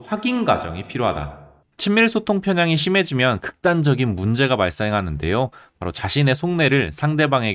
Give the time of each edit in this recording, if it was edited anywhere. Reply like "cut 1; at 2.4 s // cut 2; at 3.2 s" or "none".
cut 1; at 1.6 s